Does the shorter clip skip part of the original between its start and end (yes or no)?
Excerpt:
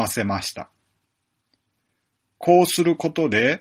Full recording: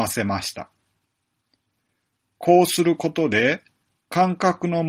no